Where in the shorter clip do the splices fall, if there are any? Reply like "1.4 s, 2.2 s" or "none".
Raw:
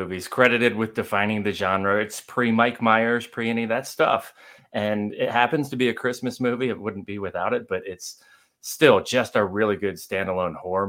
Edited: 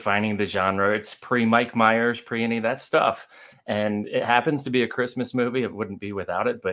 none